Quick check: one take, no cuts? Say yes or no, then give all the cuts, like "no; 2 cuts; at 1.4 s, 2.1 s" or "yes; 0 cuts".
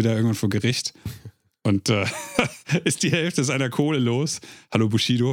yes; 0 cuts